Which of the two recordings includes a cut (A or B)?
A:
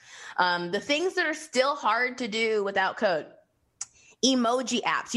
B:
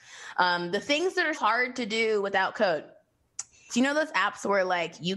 B